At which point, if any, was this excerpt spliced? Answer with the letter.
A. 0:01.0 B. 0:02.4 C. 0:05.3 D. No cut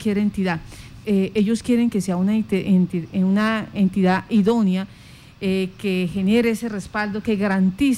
A